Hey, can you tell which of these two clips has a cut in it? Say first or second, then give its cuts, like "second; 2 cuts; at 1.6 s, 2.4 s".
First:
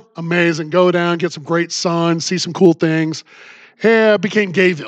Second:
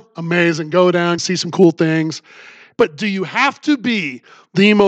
second; 2 cuts; at 1.2 s, 2.7 s